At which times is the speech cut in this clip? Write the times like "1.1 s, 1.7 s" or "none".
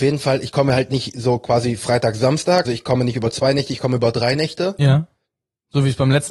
2.6 s